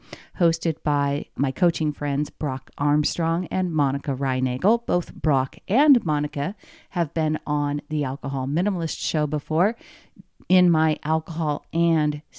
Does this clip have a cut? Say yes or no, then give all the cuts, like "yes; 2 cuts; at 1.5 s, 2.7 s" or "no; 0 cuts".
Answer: no; 0 cuts